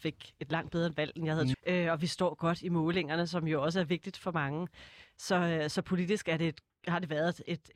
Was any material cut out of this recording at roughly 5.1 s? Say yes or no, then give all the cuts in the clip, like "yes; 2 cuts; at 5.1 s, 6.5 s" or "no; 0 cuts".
no; 1 cut; at 1.5 s